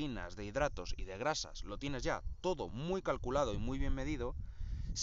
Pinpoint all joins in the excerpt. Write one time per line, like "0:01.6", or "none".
none

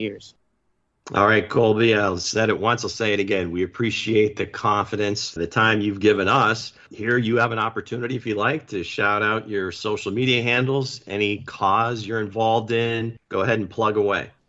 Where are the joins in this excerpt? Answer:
0:05.4

